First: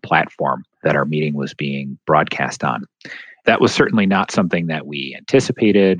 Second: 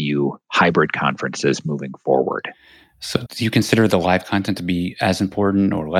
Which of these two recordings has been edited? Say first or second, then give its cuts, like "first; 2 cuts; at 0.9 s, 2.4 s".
second; 1 cut; at 3.3 s